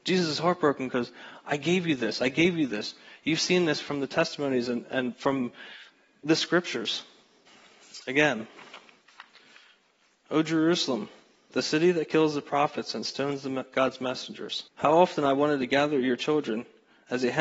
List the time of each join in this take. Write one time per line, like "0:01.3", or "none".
0:11.5
0:14.7